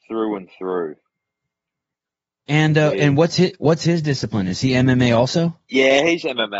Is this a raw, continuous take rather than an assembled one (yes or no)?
yes